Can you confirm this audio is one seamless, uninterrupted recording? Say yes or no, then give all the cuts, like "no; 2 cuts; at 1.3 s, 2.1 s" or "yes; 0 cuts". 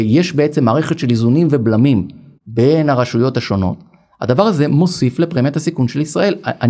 yes; 0 cuts